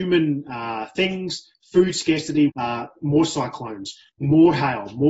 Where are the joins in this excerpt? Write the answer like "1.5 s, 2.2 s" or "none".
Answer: 2.5 s, 4.1 s